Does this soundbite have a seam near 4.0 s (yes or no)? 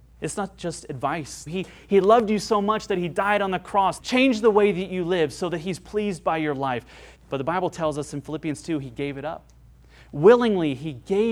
yes